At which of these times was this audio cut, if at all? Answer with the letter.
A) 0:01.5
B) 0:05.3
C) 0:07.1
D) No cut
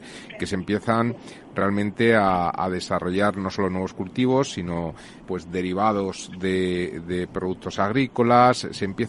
B